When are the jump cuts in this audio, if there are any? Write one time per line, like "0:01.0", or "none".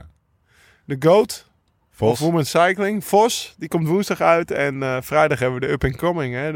none